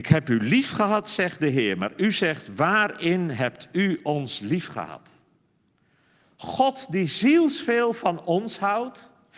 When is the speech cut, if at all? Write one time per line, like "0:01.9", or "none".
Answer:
0:06.2

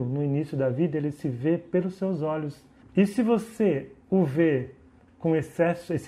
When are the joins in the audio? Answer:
0:02.8
0:04.0

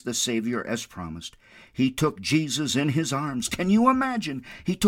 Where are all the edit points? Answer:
none

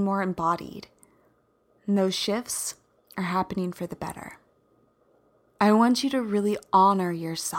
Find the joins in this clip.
0:05.5

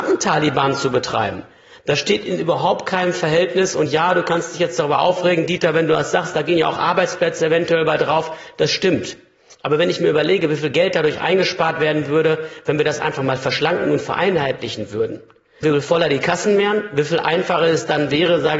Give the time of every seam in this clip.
0:15.6

